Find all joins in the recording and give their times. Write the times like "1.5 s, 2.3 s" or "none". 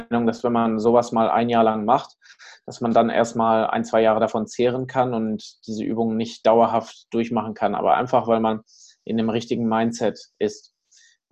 none